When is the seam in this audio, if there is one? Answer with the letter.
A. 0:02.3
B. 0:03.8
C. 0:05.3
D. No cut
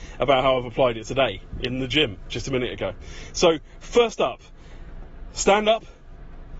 D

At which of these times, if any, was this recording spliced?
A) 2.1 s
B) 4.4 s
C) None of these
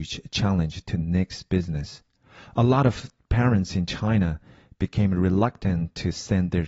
C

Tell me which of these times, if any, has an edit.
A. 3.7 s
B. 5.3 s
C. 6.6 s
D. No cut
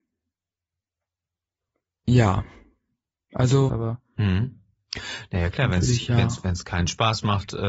A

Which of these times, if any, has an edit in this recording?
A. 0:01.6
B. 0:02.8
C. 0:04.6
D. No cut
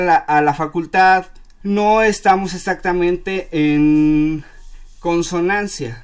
A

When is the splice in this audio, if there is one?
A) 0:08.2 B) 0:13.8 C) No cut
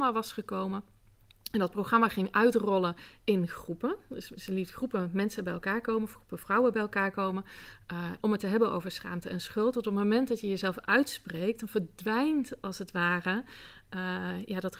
A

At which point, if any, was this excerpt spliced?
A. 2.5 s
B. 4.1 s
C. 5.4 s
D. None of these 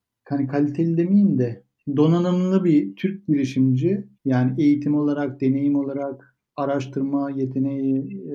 B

